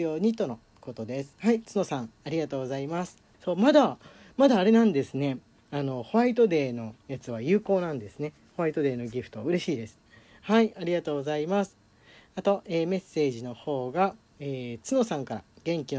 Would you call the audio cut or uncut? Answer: cut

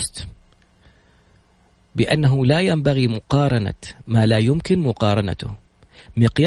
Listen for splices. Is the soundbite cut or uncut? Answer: uncut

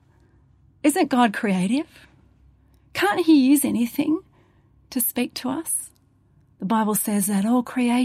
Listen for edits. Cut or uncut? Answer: uncut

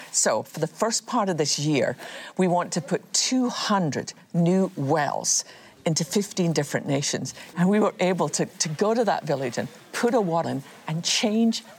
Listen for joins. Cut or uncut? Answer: cut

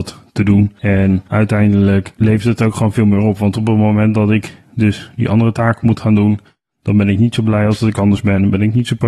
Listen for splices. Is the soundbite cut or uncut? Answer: uncut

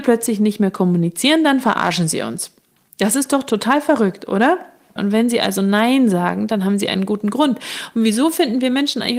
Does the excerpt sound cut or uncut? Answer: cut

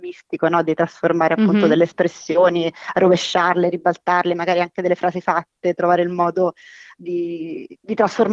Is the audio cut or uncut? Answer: uncut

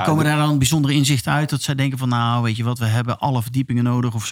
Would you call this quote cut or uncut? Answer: uncut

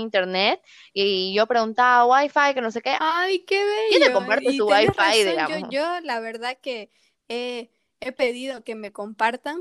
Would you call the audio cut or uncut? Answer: cut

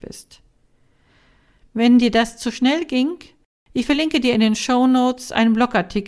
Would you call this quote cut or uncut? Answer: uncut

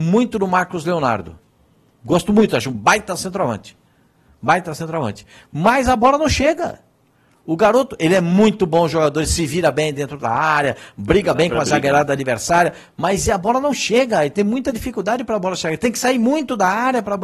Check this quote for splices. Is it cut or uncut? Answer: uncut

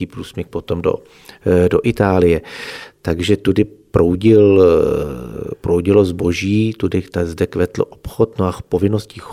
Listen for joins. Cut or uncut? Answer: uncut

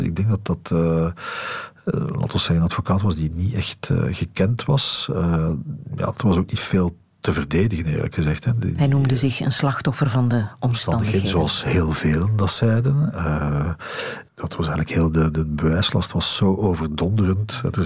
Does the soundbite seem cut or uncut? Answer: uncut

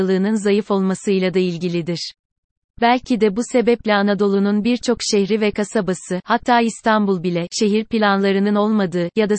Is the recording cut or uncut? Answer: uncut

